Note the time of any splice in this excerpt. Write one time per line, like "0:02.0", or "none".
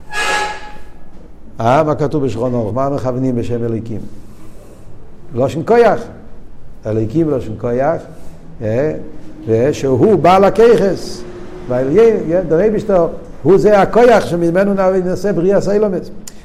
none